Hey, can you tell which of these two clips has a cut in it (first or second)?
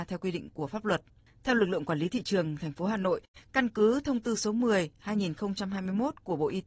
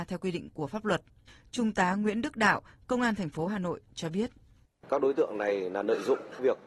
first